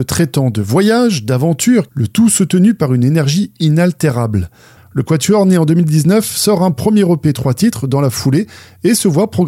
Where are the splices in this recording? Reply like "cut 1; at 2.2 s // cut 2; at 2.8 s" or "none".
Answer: cut 1; at 1.9 s // cut 2; at 4.8 s